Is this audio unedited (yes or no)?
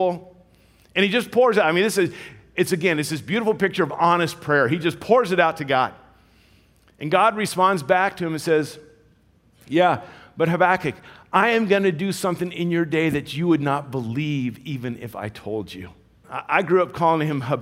no